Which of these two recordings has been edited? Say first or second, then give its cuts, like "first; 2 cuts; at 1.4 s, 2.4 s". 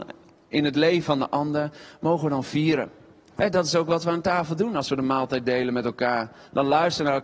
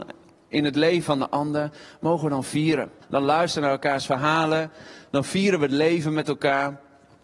second; 1 cut; at 3.0 s